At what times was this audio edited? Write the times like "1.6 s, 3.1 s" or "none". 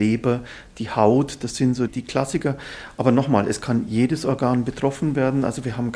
1.9 s